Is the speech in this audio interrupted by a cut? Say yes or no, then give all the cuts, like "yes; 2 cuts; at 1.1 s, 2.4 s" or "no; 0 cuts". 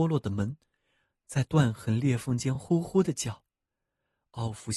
no; 0 cuts